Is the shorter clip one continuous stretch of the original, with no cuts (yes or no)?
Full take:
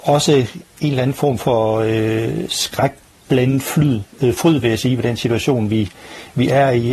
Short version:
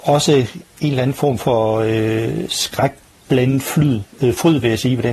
yes